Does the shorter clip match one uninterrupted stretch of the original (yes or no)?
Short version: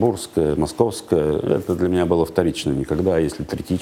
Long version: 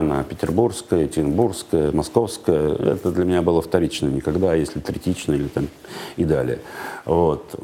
yes